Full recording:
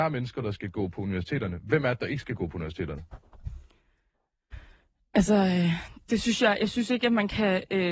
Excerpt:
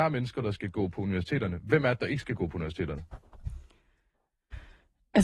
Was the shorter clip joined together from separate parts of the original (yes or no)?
no